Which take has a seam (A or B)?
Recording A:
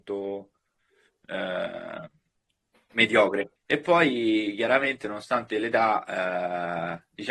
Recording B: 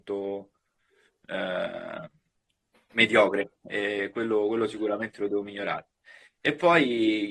A